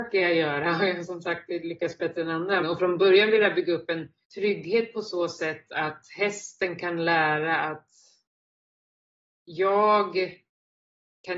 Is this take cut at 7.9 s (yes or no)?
no